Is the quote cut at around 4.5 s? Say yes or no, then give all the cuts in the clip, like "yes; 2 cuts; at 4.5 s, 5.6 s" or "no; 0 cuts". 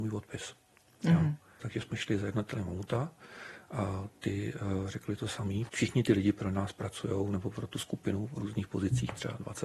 no; 0 cuts